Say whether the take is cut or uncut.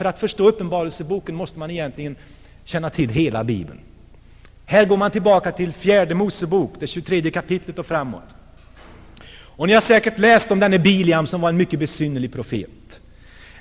uncut